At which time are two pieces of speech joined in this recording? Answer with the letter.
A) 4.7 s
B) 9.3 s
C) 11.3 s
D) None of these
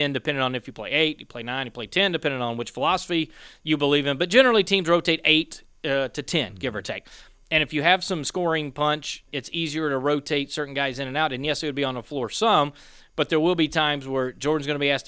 B